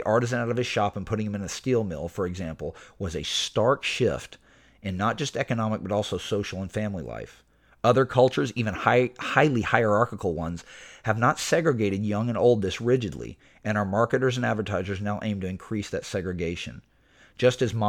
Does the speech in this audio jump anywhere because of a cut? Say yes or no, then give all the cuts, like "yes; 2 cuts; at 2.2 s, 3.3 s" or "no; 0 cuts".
no; 0 cuts